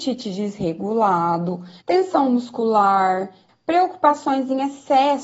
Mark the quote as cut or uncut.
cut